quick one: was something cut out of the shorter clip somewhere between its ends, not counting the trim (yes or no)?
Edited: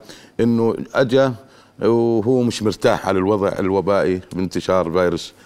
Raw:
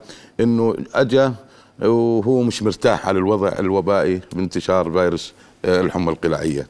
no